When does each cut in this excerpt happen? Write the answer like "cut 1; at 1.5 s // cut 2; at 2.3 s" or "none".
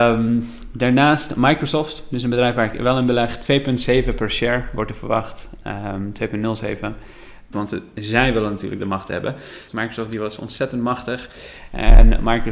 cut 1; at 7.5 s // cut 2; at 9.7 s